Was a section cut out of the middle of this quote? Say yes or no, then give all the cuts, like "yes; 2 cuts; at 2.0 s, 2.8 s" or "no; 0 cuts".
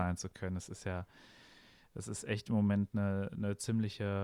no; 0 cuts